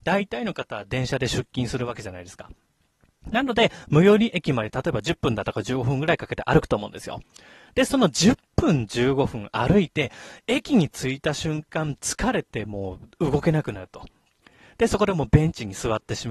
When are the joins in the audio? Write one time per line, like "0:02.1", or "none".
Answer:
none